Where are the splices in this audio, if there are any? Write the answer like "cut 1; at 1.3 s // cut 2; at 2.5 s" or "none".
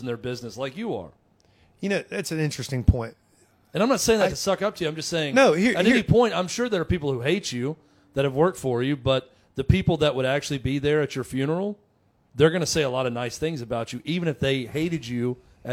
none